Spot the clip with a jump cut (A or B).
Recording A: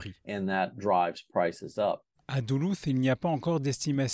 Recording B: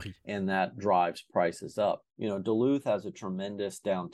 B